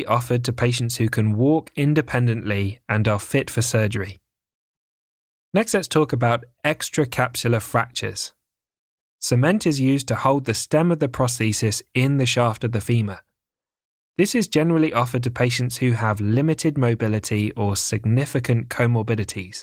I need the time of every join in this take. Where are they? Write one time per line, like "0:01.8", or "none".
0:09.0

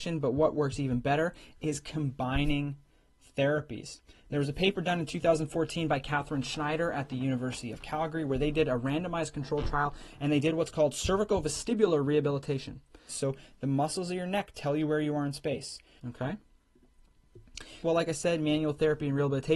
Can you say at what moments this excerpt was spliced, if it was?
0:13.1
0:16.0
0:17.8

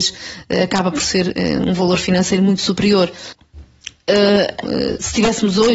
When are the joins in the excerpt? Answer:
0:03.3
0:04.6

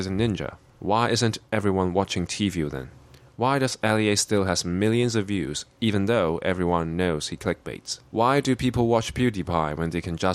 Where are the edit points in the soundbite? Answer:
0:08.1

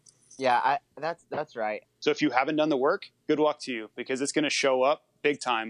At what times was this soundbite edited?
0:01.8
0:03.2

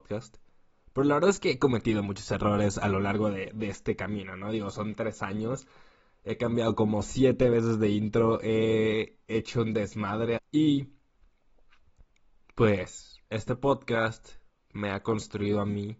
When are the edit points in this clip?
0:10.4
0:13.3

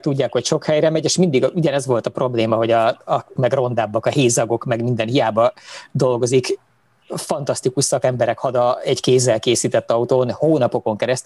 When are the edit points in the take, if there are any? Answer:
0:03.4

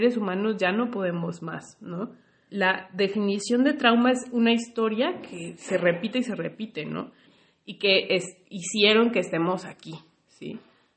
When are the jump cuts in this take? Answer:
0:02.5
0:07.2

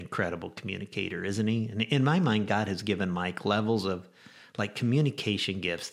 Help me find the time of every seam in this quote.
none

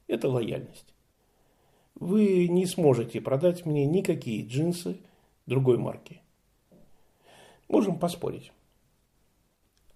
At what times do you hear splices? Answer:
none

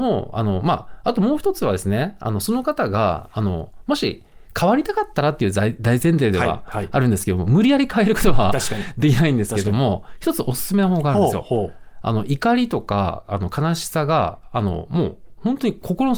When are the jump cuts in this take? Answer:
none

